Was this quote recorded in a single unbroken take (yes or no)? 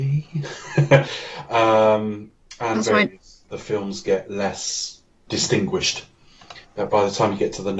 no